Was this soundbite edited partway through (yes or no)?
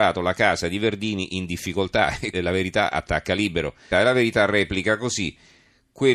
yes